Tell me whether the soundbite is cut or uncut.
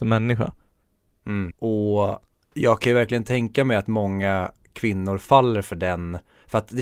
cut